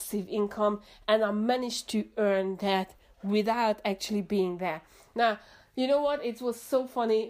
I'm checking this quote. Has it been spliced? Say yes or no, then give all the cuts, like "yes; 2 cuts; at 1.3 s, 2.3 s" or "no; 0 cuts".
no; 0 cuts